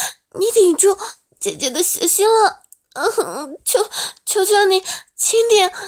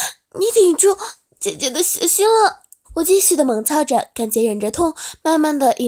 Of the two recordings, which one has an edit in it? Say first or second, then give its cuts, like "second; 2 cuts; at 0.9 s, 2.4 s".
second; 1 cut; at 2.8 s